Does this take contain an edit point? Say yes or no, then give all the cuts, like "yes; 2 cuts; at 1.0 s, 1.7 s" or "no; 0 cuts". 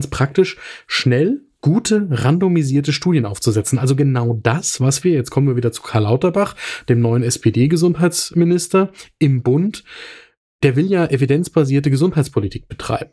no; 0 cuts